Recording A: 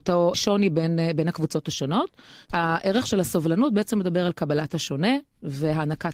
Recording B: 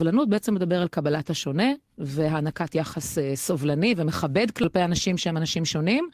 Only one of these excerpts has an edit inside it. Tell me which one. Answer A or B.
A